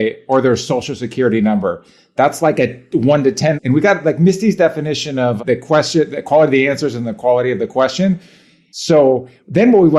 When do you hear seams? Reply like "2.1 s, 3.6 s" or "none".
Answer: 3.5 s, 5.4 s, 8.7 s